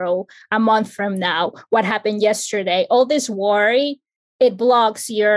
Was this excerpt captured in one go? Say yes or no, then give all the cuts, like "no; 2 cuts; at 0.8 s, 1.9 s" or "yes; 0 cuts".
yes; 0 cuts